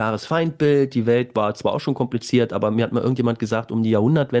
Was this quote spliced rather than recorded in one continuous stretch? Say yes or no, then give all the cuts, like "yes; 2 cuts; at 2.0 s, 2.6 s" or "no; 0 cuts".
no; 0 cuts